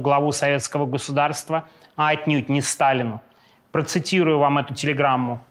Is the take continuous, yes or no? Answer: yes